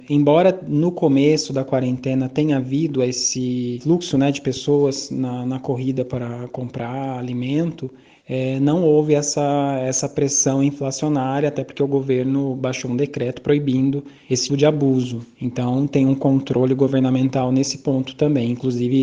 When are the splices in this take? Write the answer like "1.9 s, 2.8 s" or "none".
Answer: 14.5 s